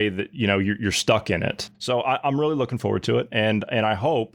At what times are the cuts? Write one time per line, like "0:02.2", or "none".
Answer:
0:01.7